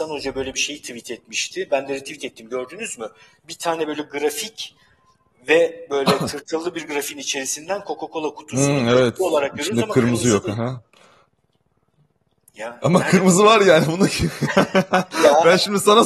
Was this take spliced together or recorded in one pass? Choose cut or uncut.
uncut